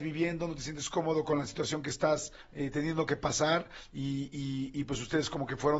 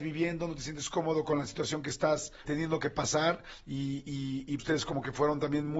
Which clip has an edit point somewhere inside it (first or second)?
second